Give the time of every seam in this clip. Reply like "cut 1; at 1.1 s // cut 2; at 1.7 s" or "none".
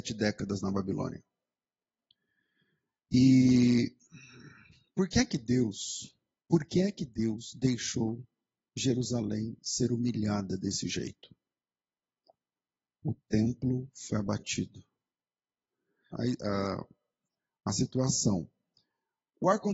cut 1; at 6.4 s // cut 2; at 16.1 s